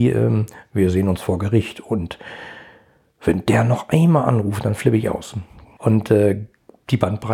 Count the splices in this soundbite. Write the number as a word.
one